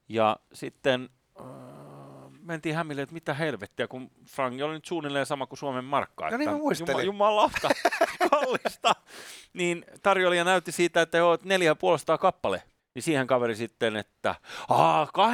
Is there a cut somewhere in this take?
yes; 1 cut; at 12.8 s

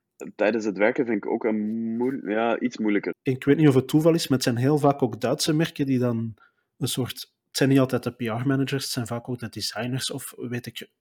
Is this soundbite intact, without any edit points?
no; 1 cut; at 3.1 s

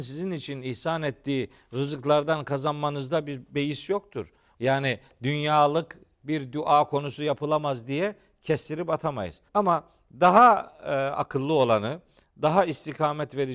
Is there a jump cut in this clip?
yes; 2 cuts; at 4.5 s, 9.5 s

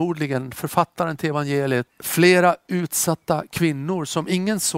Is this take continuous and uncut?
no; 1 cut; at 1.9 s

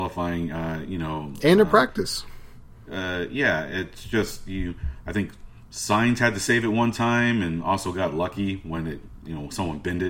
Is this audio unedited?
yes; 0 cuts

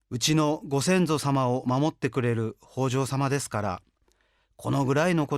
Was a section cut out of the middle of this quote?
no; 0 cuts

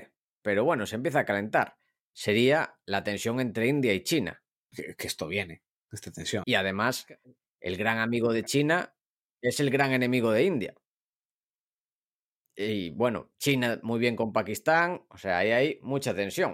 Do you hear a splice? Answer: yes; 3 cuts; at 4.7 s, 6.4 s, 13.3 s

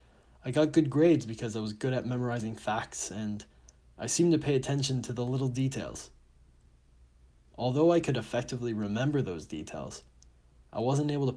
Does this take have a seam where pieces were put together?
no; 0 cuts

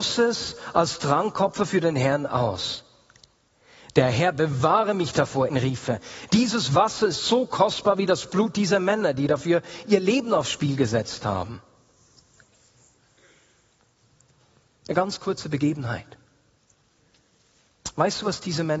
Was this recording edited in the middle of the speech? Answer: yes; 1 cut; at 5.5 s

